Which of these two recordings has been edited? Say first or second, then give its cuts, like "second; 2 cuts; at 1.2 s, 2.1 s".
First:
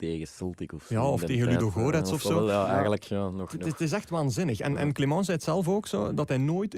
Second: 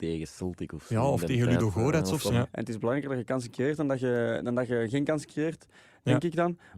second; 1 cut; at 2.3 s